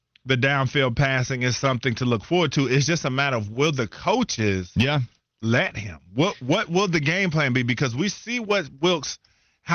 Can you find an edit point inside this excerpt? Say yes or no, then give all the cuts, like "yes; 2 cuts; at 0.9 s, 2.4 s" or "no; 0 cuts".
no; 0 cuts